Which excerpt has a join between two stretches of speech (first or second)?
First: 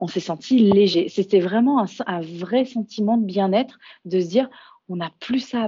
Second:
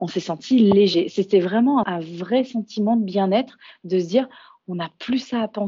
second